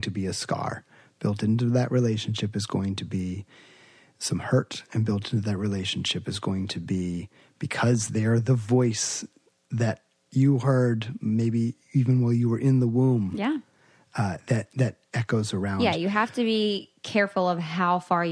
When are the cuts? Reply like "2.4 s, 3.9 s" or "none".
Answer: none